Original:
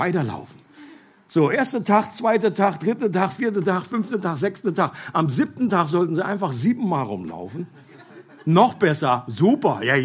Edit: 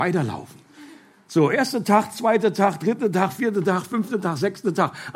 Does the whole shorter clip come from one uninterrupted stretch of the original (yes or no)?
yes